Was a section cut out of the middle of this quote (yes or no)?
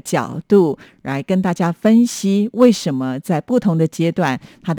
no